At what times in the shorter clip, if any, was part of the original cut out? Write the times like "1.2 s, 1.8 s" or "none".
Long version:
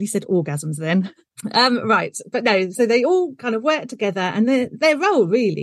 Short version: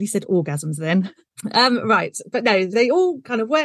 2.7 s